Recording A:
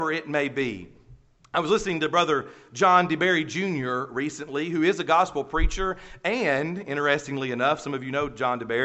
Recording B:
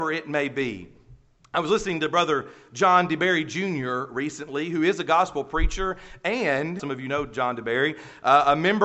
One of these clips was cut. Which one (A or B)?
B